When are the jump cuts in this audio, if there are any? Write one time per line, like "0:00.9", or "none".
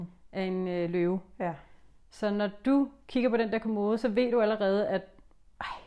none